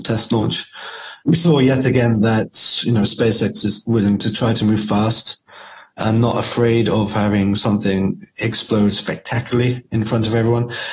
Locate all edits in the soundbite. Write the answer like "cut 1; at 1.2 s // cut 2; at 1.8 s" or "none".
none